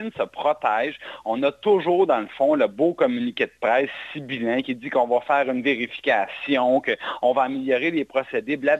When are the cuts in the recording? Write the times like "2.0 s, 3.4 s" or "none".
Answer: 4.6 s

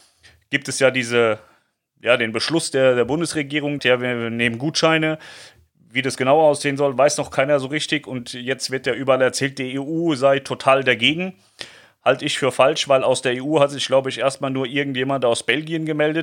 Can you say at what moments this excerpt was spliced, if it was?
3.8 s

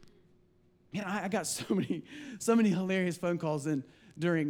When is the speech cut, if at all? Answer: none

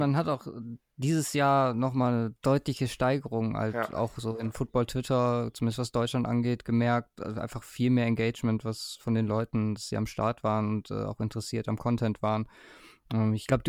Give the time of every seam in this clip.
none

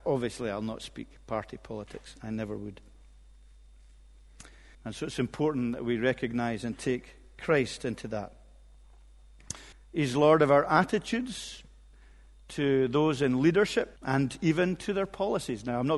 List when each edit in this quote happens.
4.7 s, 9.7 s, 14.0 s

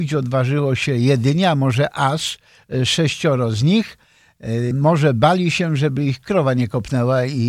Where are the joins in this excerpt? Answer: 4.7 s

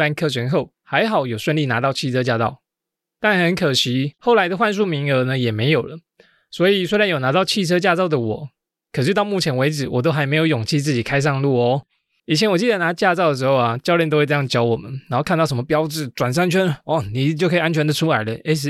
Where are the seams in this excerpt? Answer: 12.2 s

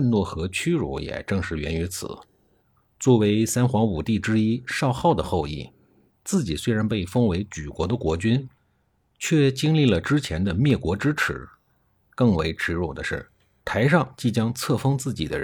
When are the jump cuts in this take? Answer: none

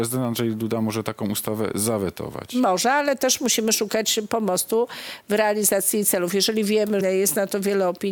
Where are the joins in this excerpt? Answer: 7.0 s

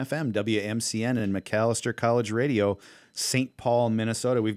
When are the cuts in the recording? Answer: none

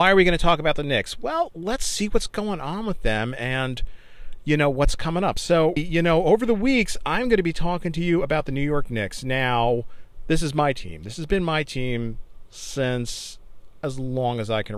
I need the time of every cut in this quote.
5.8 s

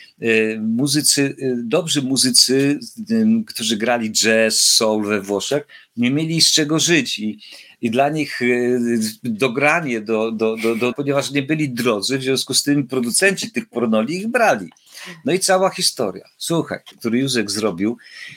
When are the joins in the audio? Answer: 10.9 s, 16.9 s

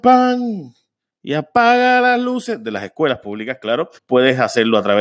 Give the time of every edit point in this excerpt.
4.0 s

